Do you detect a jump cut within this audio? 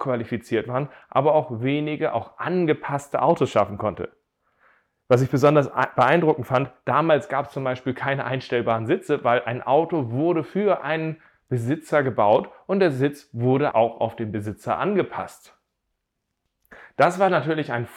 yes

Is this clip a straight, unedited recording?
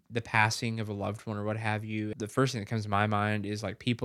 no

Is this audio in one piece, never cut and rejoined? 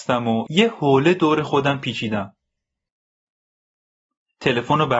yes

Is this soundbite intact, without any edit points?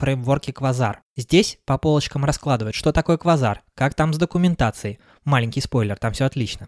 no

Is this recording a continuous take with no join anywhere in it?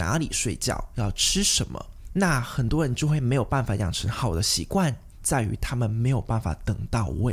no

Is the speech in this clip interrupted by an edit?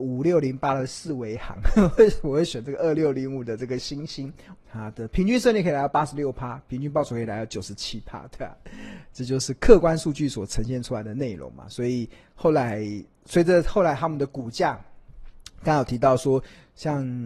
yes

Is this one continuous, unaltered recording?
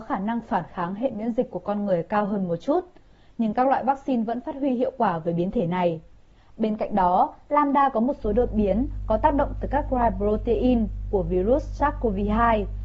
yes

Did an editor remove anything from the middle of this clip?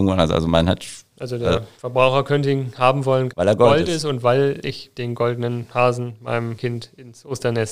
yes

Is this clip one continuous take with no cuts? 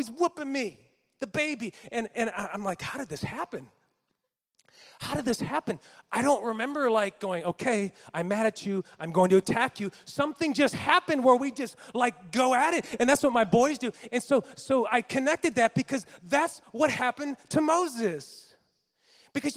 yes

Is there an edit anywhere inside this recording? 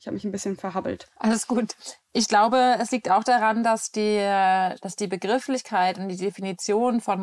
no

